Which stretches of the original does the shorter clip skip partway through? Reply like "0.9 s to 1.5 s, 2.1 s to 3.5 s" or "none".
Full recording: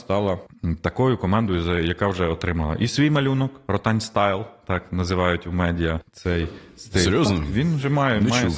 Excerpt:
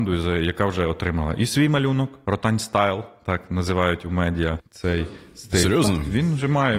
none